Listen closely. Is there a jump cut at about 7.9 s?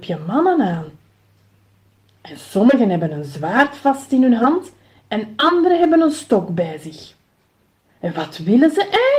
yes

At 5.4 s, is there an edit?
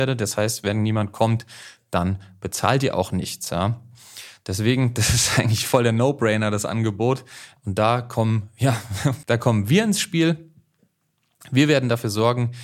no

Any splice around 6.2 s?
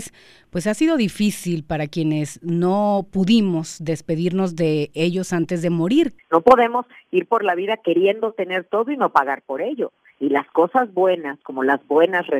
yes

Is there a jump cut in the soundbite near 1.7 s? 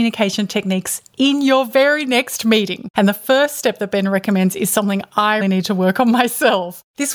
no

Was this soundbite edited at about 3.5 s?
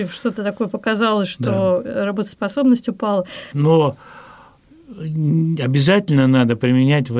yes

